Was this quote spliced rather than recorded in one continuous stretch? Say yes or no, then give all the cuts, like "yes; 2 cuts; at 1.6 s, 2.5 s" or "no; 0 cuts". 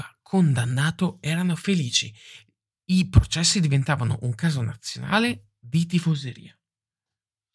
no; 0 cuts